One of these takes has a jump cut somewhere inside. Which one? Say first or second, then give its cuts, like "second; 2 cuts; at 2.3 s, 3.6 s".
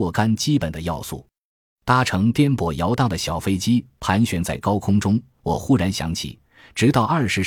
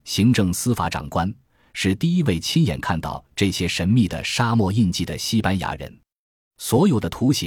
second; 1 cut; at 6.5 s